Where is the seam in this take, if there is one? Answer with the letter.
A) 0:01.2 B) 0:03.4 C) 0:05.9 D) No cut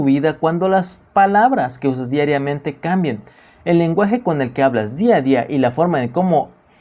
D